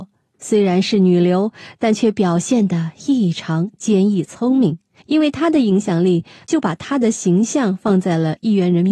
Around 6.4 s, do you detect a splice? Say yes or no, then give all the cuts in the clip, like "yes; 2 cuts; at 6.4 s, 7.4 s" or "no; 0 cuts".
yes; 2 cuts; at 5.0 s, 6.4 s